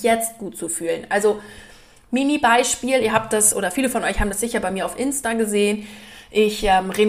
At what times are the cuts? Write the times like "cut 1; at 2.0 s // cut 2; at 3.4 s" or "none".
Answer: none